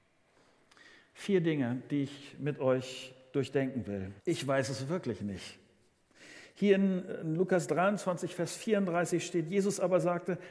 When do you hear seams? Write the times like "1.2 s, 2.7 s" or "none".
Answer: 4.2 s